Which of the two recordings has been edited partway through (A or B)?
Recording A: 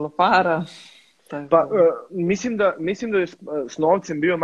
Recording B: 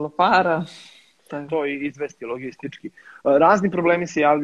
B